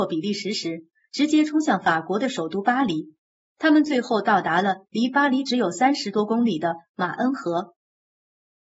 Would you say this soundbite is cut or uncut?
uncut